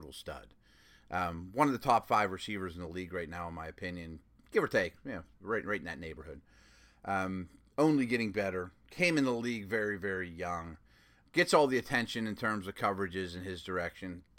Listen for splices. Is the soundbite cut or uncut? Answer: uncut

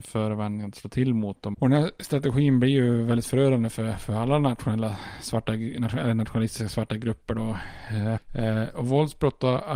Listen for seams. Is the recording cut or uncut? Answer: cut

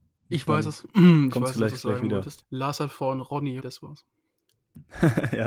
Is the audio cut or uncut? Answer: cut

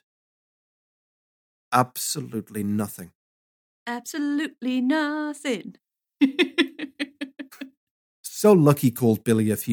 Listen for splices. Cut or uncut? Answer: uncut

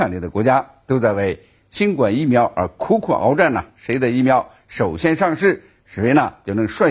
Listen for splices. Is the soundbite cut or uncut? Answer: uncut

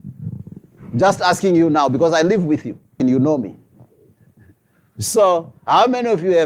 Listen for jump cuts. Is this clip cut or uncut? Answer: cut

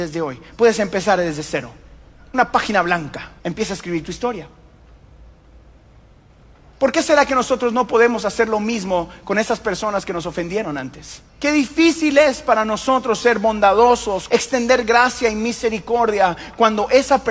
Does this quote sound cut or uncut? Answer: cut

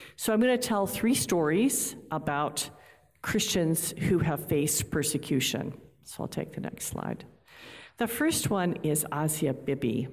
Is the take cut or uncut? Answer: uncut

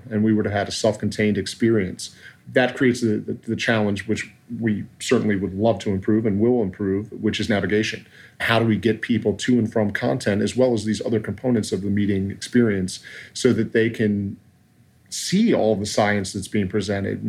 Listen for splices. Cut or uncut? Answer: uncut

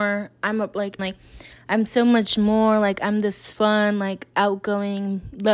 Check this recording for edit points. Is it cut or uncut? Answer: cut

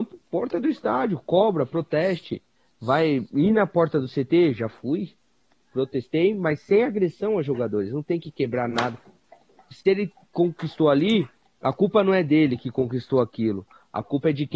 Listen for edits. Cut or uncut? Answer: uncut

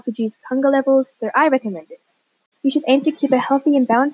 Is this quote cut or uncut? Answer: cut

